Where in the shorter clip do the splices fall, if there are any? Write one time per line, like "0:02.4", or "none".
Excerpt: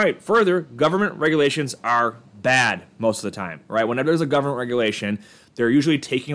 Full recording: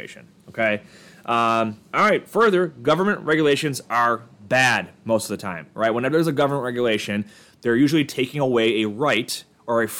none